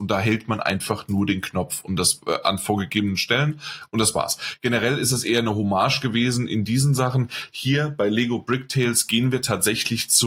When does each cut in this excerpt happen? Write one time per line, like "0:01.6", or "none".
none